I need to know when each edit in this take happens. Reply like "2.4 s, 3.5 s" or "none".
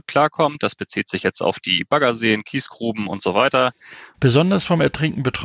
4.1 s